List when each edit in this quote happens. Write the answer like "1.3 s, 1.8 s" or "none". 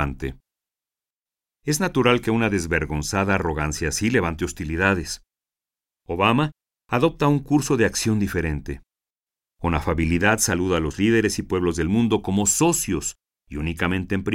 none